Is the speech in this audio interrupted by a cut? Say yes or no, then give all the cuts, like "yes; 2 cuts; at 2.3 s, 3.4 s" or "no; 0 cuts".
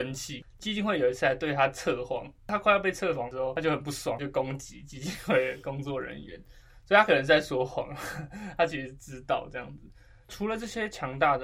no; 0 cuts